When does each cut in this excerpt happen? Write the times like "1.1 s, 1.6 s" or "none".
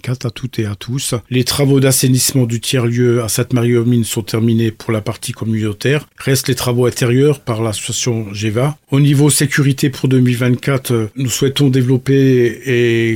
1.3 s